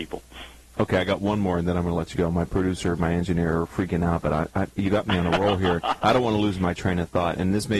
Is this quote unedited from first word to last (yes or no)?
yes